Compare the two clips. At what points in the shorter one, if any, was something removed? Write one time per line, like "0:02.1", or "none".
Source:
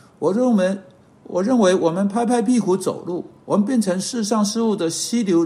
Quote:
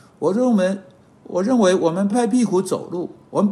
0:02.1